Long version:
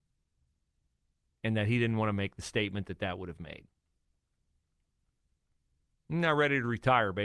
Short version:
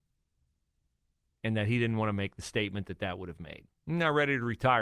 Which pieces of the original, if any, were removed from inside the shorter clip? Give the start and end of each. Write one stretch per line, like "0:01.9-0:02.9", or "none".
0:03.8-0:06.0